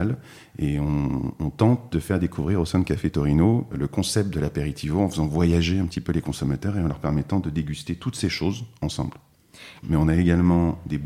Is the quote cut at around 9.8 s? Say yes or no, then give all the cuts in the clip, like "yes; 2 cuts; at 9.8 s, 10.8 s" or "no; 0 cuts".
yes; 2 cuts; at 3.7 s, 9.8 s